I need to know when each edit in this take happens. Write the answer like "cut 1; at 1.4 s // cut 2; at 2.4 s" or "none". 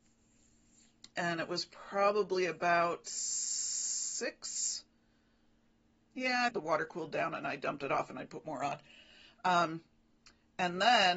cut 1; at 6.5 s